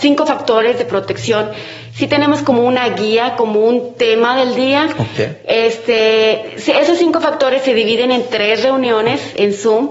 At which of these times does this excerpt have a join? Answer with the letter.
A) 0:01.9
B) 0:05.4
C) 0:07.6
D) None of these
D